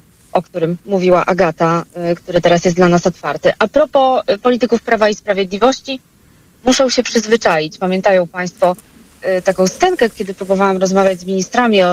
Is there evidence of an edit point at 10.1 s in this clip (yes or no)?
yes